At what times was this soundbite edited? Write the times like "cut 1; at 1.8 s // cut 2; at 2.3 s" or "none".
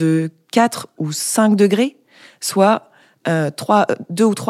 none

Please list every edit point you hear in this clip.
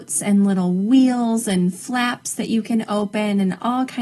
none

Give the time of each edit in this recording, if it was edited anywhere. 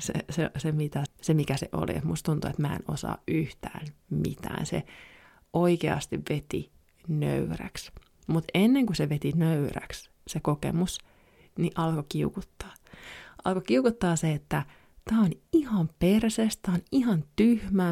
cut 1; at 1.1 s

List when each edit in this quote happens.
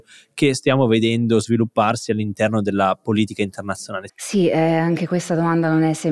cut 1; at 4.1 s

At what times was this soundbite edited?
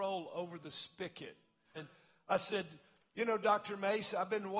cut 1; at 1.8 s

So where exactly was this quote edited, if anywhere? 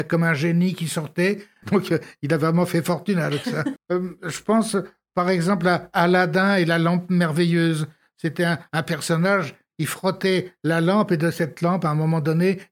cut 1; at 1.6 s // cut 2; at 3.8 s

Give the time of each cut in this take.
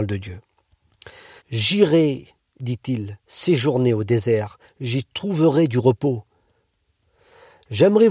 cut 1; at 1.4 s

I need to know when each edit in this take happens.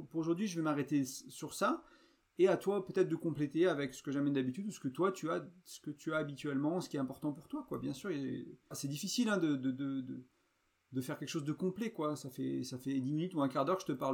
cut 1; at 8.7 s

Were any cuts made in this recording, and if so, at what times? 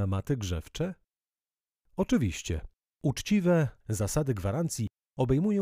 cut 1; at 3.8 s

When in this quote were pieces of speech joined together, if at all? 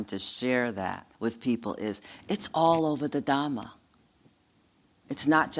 cut 1; at 1.1 s

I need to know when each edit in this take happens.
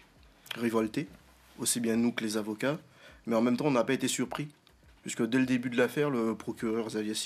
none

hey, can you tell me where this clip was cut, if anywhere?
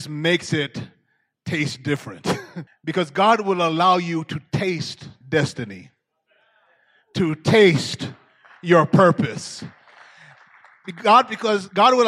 cut 1; at 2.7 s

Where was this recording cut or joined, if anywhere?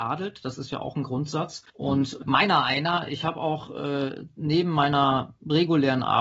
cut 1; at 1.7 s

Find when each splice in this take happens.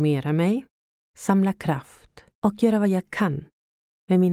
cut 1; at 1.0 s // cut 2; at 2.3 s

